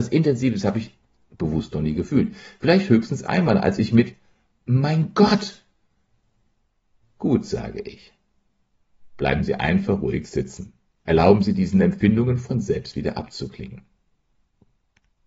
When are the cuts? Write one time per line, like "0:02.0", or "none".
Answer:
none